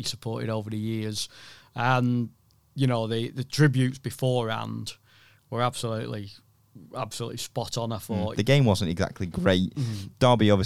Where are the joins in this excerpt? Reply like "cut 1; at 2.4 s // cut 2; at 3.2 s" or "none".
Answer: cut 1; at 8.3 s